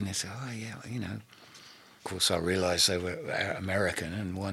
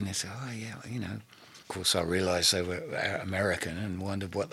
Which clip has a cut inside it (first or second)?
second